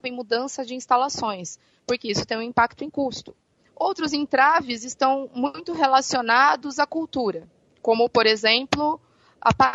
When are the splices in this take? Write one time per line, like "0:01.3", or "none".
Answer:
0:03.6